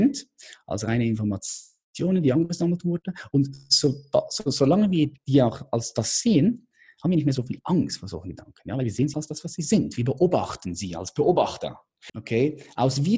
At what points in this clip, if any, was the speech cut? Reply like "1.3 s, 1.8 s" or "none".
5.2 s, 9.1 s, 12.1 s

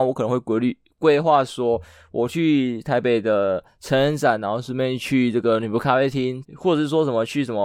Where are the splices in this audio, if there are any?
6.4 s

